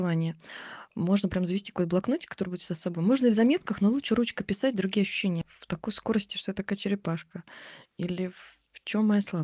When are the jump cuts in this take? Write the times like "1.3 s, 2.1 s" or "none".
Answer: 5.4 s